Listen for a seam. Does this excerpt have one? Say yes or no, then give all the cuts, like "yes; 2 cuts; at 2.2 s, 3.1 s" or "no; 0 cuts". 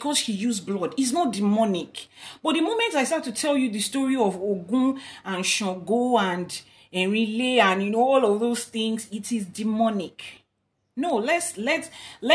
no; 0 cuts